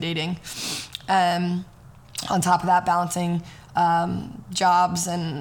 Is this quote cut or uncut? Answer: uncut